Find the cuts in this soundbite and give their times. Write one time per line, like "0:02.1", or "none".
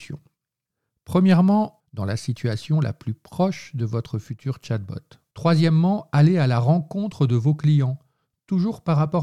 0:01.8
0:05.3